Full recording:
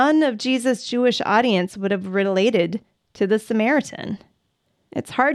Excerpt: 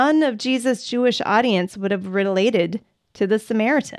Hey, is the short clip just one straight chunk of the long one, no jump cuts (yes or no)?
yes